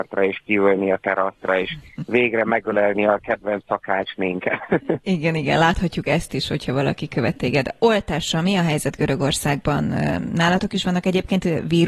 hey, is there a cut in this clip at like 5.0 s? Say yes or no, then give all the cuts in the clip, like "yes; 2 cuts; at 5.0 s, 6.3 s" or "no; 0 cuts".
no; 0 cuts